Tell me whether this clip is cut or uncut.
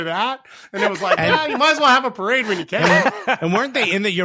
uncut